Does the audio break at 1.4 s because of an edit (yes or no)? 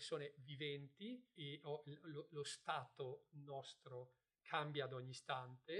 yes